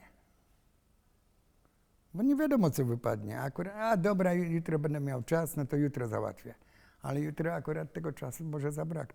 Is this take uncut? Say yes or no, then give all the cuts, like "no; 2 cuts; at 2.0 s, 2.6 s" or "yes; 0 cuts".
yes; 0 cuts